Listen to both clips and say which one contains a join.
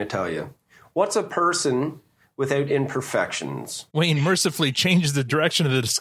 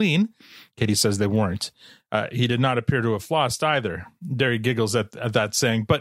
first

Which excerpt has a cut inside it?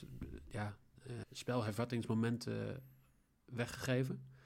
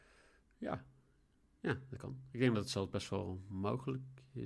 first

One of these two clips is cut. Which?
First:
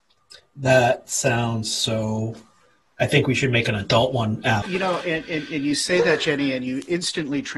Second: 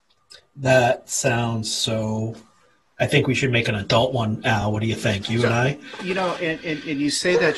first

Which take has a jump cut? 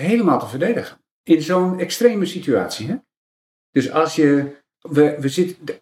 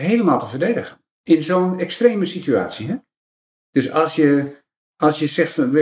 first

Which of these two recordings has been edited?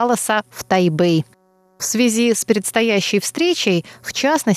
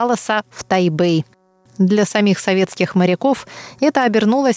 second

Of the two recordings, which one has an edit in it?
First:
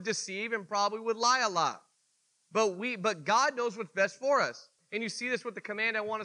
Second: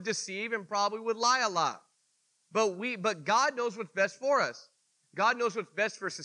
first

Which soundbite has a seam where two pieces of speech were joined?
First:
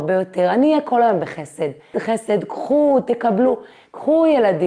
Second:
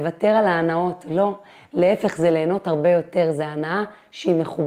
first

